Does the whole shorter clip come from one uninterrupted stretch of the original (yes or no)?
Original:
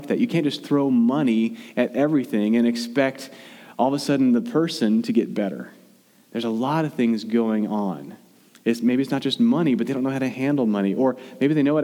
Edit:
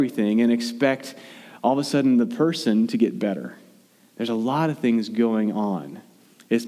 yes